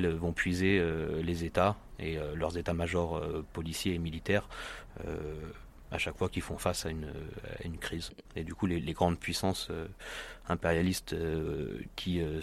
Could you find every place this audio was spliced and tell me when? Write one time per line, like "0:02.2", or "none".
0:08.2